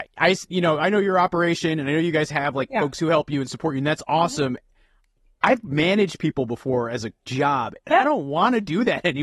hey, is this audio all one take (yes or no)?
yes